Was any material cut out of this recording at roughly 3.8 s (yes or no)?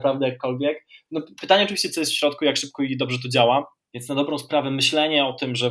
yes